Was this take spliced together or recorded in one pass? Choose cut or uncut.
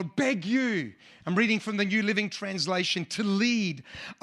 uncut